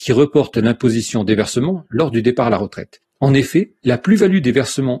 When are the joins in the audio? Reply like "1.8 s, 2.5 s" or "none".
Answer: 3.0 s